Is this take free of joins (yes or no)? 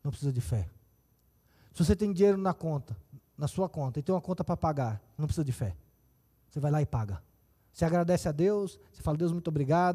no